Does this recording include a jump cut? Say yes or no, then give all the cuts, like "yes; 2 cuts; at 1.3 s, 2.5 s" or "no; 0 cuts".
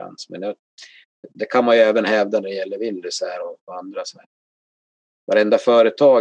no; 0 cuts